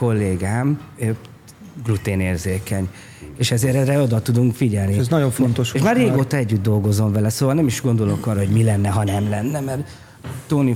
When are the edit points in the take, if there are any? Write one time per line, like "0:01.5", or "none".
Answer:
0:03.3